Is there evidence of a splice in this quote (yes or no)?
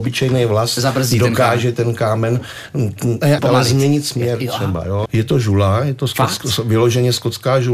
yes